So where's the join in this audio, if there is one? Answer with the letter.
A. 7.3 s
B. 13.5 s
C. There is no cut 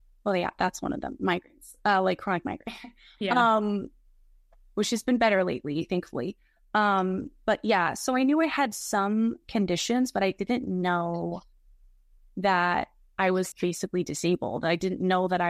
B